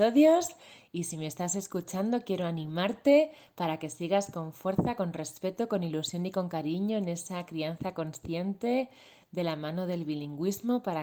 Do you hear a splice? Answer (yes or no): no